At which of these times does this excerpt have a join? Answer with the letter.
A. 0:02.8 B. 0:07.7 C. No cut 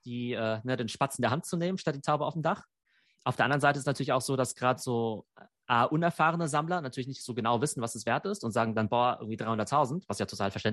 C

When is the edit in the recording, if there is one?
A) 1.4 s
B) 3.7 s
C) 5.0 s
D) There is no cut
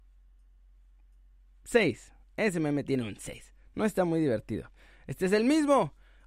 D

